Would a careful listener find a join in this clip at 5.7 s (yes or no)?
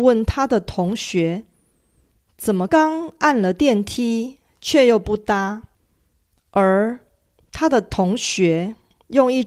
yes